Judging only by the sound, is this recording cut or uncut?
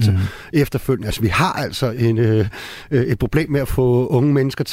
uncut